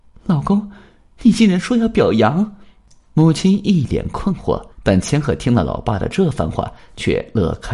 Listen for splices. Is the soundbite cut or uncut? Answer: cut